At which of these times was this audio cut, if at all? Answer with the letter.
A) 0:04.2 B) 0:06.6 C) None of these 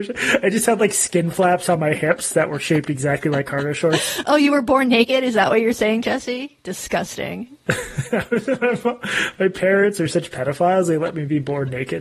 C